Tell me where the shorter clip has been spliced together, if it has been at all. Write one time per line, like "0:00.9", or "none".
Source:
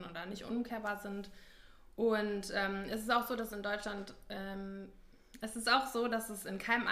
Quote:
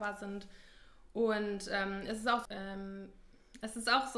0:02.5